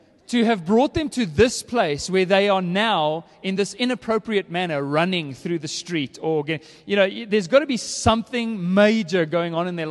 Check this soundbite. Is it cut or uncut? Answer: uncut